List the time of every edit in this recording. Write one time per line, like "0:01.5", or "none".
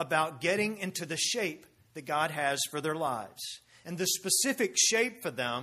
none